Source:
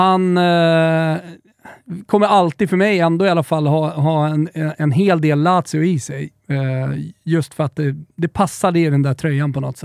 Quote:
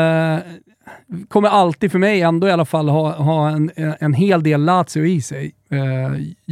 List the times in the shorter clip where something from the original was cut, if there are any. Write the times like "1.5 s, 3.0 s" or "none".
none